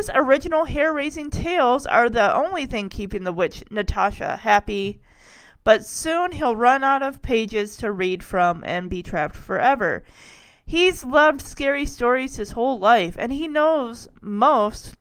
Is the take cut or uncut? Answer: uncut